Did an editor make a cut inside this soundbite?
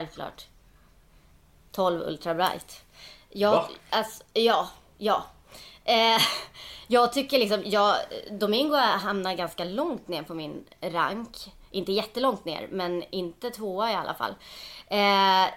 no; 0 cuts

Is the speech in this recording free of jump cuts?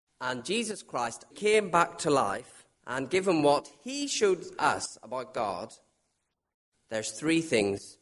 no; 2 cuts; at 1.3 s, 2.7 s

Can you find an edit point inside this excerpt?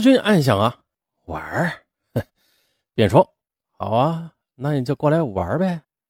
yes; 1 cut; at 2.9 s

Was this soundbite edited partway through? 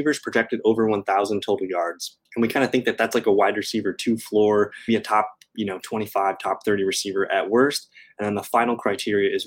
yes; 2 cuts; at 2.3 s, 4.9 s

